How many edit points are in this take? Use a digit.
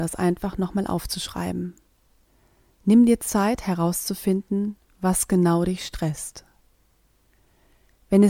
2